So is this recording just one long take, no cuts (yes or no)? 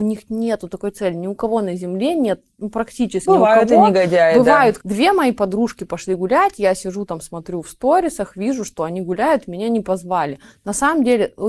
no